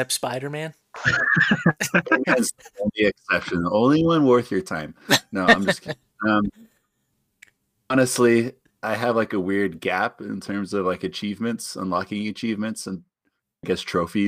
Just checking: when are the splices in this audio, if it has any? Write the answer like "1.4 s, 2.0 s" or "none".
none